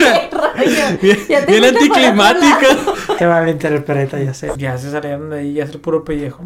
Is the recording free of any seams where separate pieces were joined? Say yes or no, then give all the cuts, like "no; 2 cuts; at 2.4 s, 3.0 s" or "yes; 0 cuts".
no; 2 cuts; at 3.2 s, 4.6 s